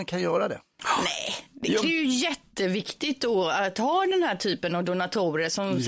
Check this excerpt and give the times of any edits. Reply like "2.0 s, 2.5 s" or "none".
1.8 s